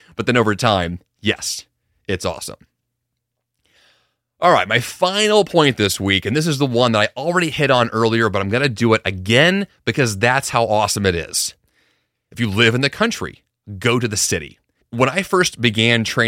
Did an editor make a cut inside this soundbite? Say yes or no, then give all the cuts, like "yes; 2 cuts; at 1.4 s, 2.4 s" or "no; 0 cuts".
yes; 2 cuts; at 12.1 s, 14.8 s